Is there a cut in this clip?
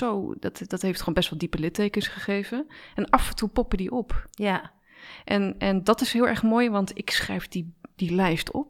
no; 0 cuts

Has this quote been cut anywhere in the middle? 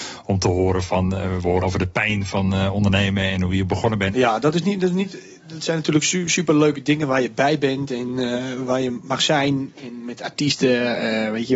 yes; 2 cuts; at 1.6 s, 4.1 s

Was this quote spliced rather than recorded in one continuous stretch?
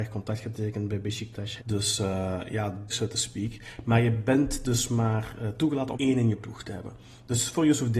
yes; 3 cuts; at 1.6 s, 2.9 s, 5.9 s

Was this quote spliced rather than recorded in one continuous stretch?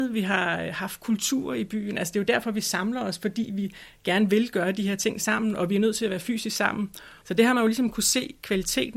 yes; 1 cut; at 7.2 s

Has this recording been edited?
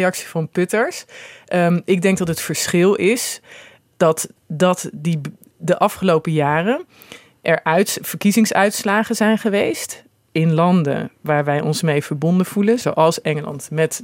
yes; 2 cuts; at 4.4 s, 12.8 s

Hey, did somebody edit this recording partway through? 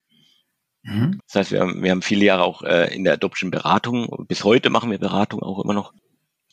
yes; 1 cut; at 1.2 s

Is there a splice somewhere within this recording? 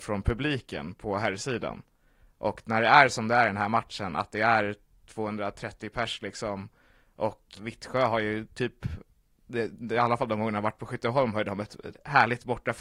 yes; 1 cut; at 7.5 s

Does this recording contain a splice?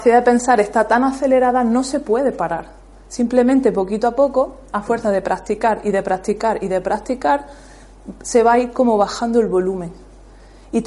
no; 0 cuts

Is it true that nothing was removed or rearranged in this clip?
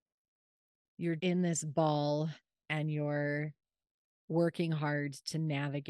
no; 1 cut; at 1.2 s

